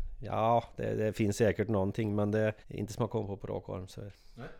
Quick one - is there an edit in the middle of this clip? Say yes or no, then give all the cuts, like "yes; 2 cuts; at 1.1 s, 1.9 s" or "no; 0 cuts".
yes; 1 cut; at 2.6 s